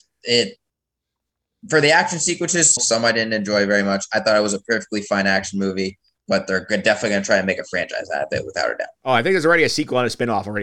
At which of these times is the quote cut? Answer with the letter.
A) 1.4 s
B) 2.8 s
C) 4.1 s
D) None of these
B